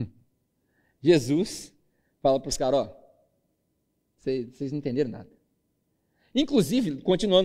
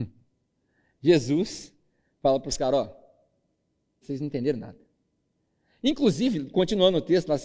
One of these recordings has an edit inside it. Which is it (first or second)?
second